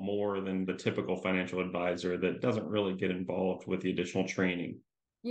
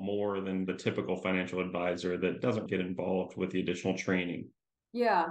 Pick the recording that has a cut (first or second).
second